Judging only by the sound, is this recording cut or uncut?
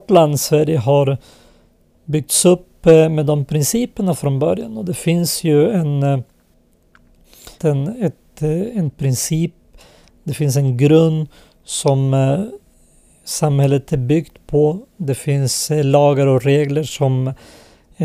cut